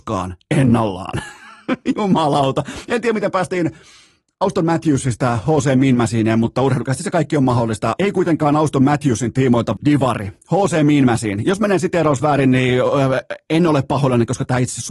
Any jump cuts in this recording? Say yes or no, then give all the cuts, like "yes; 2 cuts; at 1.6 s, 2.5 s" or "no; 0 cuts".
yes; 2 cuts; at 8.0 s, 9.8 s